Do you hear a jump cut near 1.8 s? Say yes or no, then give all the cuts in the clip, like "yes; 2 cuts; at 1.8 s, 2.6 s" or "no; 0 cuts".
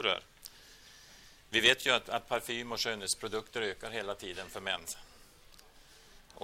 no; 0 cuts